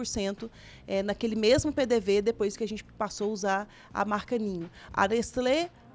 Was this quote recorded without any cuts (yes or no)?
no